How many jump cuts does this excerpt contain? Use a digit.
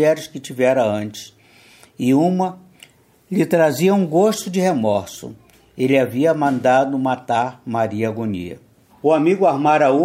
1